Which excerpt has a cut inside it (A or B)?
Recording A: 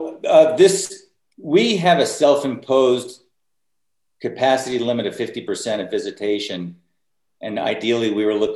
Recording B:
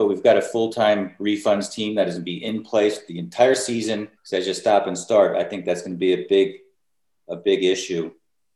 B